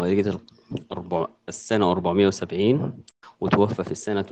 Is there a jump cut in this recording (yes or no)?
yes